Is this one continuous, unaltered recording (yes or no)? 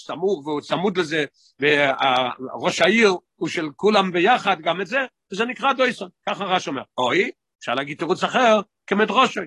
yes